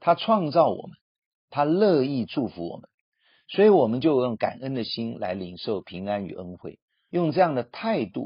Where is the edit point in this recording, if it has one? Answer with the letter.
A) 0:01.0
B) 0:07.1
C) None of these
B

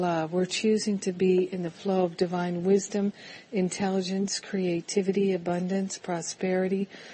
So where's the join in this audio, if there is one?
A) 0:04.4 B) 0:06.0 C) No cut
C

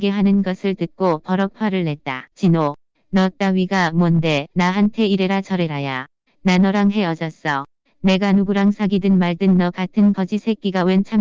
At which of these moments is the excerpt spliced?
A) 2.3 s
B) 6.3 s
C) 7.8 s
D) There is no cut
A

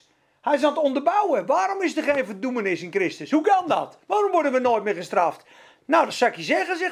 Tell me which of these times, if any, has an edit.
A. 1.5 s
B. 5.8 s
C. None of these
C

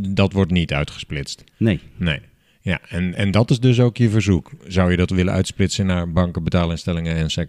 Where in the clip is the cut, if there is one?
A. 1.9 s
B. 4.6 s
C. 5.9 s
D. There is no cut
D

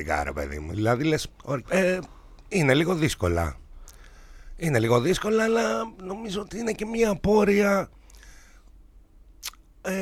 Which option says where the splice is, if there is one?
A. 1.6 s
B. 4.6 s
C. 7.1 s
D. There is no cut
A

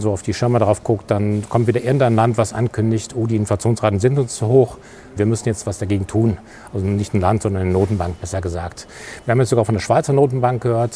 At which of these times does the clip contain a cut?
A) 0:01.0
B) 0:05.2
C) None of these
B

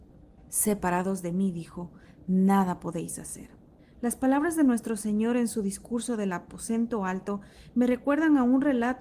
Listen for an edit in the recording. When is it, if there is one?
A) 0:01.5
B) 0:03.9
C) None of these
C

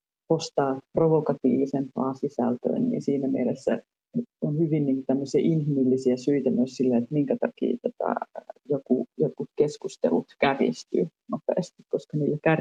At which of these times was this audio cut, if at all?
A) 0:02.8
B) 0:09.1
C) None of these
A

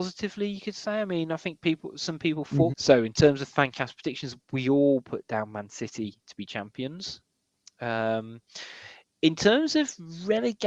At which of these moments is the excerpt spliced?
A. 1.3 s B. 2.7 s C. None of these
B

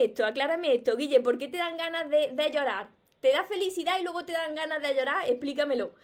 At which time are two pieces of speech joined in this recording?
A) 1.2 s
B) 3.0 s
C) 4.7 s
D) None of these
D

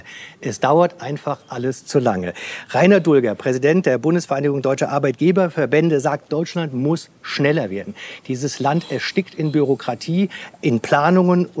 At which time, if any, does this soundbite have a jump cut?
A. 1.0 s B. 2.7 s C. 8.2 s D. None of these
D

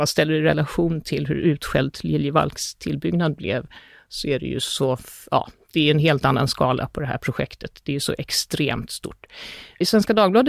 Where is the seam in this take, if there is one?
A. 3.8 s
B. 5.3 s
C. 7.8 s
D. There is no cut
D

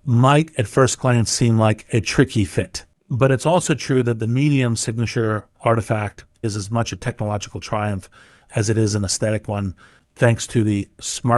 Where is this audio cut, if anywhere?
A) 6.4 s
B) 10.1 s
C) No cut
A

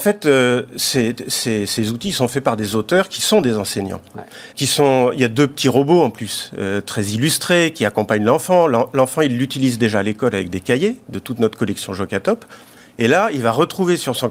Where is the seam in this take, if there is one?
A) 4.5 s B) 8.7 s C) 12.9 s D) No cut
A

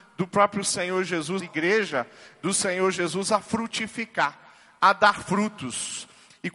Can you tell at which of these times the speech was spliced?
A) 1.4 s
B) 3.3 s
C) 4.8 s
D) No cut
A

